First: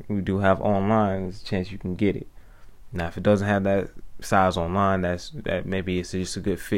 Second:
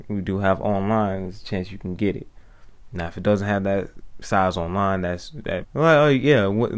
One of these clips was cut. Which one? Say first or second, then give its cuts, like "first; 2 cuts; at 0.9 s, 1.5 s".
second; 1 cut; at 5.6 s